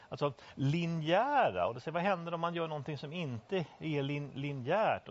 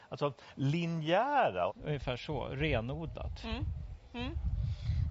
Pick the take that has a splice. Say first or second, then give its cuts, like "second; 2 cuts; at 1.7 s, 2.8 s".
second; 1 cut; at 1.7 s